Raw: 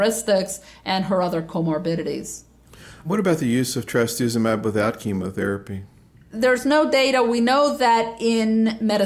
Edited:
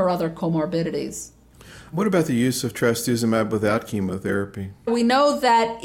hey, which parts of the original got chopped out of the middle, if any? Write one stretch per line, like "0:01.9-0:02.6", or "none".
0:06.0-0:07.2

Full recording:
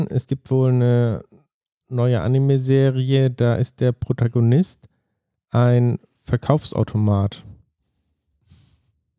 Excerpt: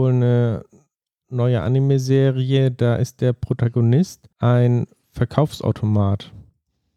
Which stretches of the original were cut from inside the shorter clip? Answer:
0:04.9-0:05.4

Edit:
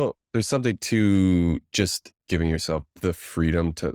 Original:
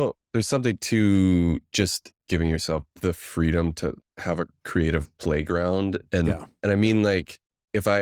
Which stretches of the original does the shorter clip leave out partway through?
none

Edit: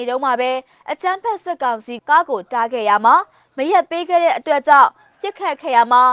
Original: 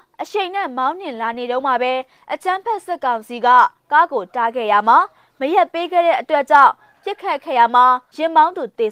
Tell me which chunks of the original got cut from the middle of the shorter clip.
0:03.4-0:03.8

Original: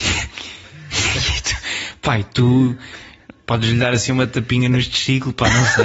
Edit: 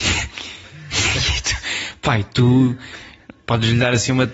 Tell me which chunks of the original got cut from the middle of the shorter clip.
none

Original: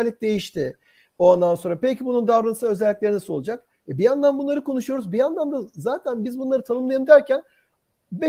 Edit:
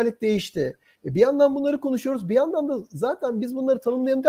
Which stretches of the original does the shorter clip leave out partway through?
0:00.9-0:03.8

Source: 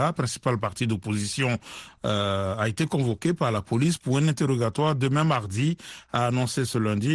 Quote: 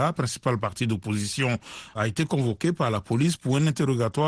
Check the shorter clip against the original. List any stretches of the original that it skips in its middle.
0:01.9-0:02.6

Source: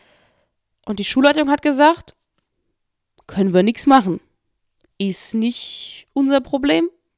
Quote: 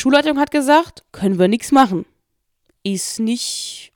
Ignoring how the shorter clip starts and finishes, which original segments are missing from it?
0:02.2-0:03.2

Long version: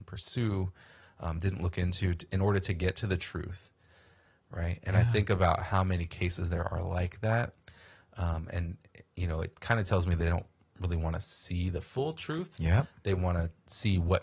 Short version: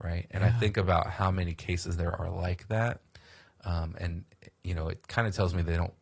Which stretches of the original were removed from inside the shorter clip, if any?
none

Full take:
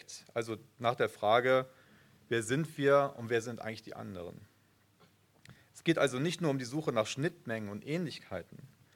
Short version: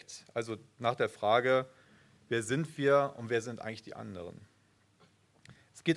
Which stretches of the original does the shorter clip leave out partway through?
none

